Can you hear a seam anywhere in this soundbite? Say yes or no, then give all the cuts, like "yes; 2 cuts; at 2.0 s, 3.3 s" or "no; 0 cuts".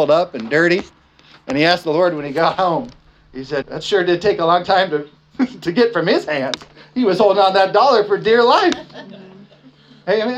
yes; 1 cut; at 3.6 s